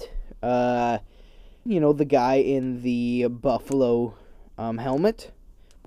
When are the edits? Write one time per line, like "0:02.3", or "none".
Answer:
0:01.7